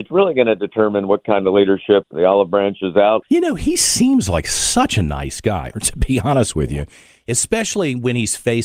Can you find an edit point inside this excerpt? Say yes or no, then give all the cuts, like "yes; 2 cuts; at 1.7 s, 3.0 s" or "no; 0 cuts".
yes; 3 cuts; at 2.0 s, 3.2 s, 5.7 s